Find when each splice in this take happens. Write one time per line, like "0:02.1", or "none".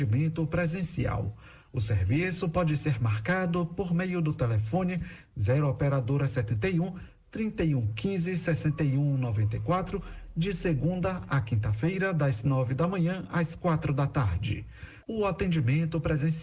0:01.7
0:15.0

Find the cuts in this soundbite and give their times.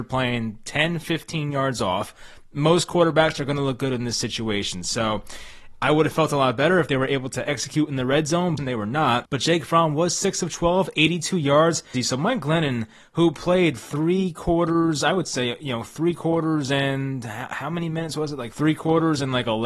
0:08.6
0:11.9

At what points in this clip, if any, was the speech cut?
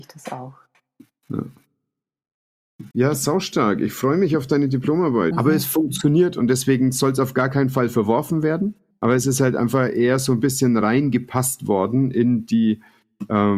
0:02.9
0:05.3
0:08.9

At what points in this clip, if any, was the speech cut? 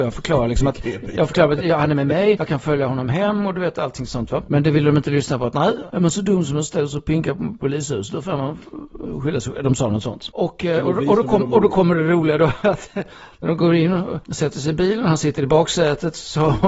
none

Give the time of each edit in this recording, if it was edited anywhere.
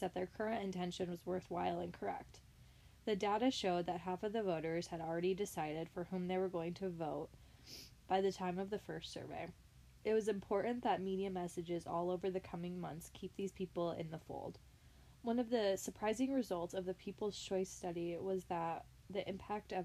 0:15.1

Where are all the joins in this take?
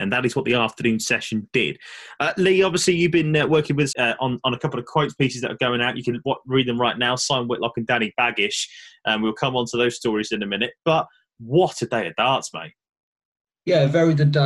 0:03.9

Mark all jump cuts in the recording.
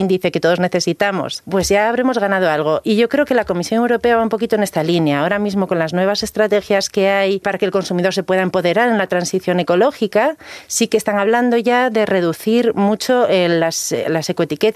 none

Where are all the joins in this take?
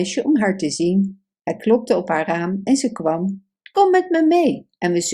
0:03.7

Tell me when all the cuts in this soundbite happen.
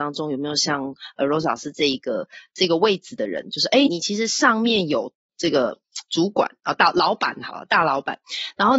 0:03.9

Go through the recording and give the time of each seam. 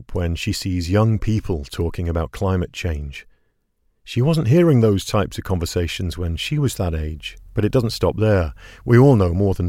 0:07.5

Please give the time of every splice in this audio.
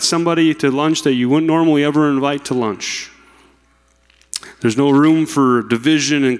none

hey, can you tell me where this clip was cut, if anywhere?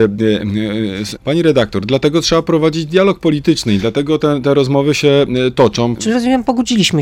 0:01.2
0:06.0

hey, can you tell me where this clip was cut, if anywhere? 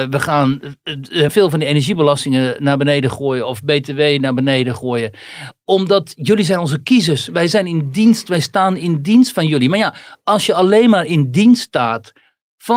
0:01.3

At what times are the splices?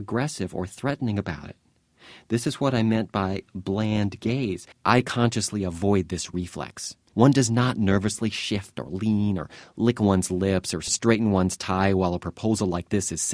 0:04.7
0:07.1

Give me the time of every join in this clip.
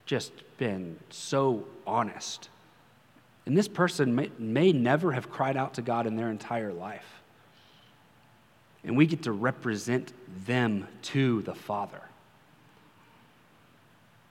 0:03.4

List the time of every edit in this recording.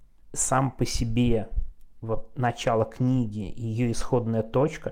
none

